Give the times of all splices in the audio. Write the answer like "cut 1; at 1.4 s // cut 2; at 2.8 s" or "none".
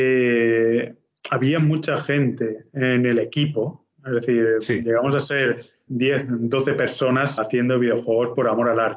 cut 1; at 5.9 s // cut 2; at 7.4 s